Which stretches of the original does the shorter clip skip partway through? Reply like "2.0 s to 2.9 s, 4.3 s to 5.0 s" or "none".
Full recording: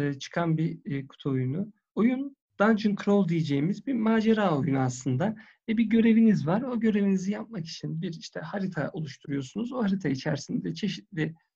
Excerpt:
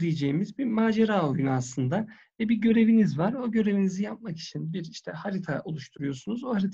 none